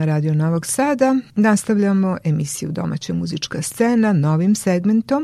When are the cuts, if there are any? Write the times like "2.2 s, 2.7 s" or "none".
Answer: 1.3 s